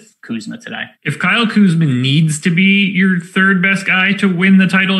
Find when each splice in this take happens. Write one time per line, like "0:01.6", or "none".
0:00.9